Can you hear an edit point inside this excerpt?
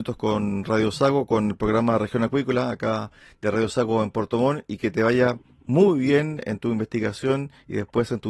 no; 0 cuts

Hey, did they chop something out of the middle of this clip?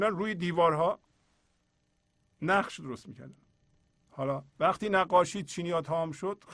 yes; 1 cut; at 4.5 s

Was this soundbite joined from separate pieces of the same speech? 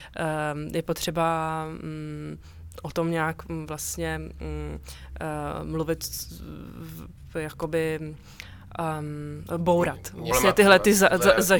yes; 1 cut; at 10.3 s

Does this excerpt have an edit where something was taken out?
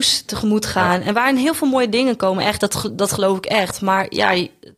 no; 0 cuts

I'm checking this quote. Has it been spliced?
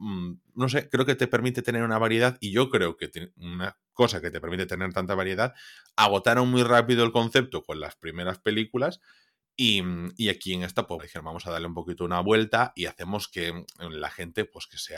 yes; 1 cut; at 11.0 s

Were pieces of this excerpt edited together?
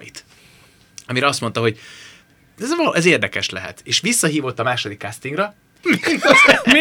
yes; 1 cut; at 5.8 s

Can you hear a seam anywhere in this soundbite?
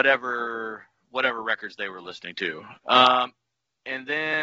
yes; 1 cut; at 2.8 s

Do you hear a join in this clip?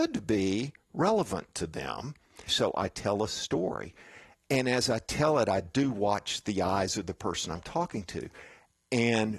yes; 1 cut; at 2.5 s

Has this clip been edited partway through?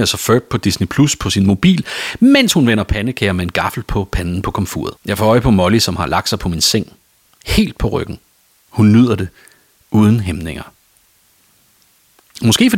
yes; 2 cuts; at 5.0 s, 8.5 s

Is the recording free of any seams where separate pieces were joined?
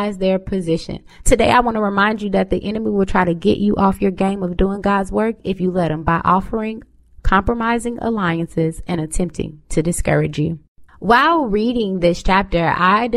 no; 2 cuts; at 1.2 s, 10.9 s

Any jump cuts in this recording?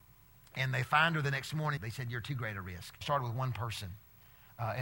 yes; 2 cuts; at 1.8 s, 3.0 s

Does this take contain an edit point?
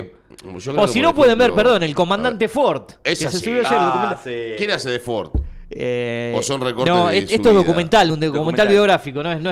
no; 0 cuts

